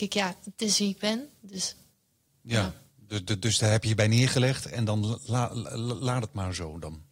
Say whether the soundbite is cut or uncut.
uncut